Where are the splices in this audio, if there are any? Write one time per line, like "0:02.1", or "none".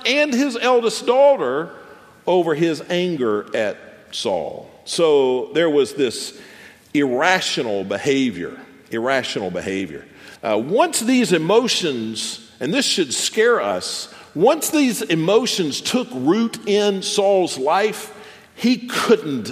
0:10.4